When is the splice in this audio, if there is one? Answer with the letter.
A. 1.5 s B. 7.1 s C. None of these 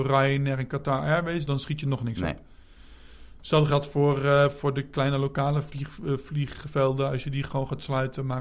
A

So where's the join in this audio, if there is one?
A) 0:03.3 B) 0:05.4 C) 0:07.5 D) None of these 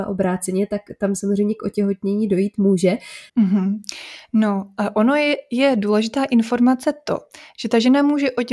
A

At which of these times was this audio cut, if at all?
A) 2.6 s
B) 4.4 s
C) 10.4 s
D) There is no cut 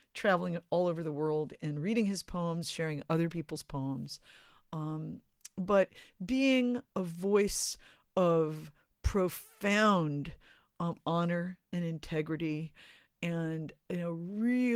A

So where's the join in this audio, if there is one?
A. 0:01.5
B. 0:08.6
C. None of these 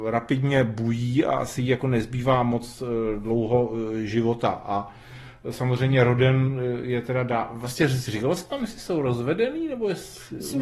C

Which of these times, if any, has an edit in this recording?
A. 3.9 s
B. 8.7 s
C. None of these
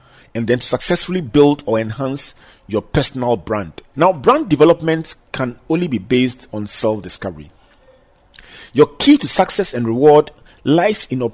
A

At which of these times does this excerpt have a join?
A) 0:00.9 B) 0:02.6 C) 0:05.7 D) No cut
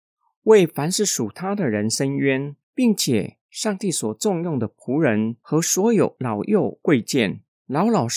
B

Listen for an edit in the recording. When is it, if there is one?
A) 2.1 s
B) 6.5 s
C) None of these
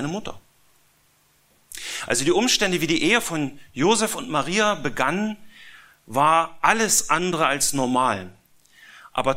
C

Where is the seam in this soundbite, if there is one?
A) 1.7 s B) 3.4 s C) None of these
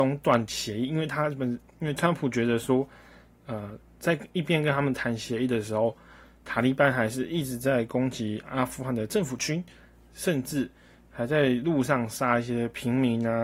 A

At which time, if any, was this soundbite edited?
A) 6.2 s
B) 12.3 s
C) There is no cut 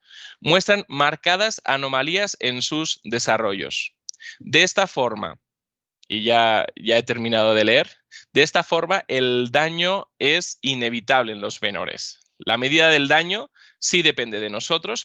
C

